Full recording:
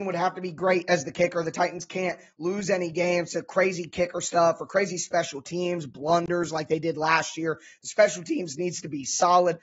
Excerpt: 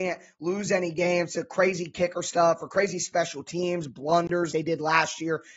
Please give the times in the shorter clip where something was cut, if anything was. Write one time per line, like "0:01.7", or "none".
0:04.5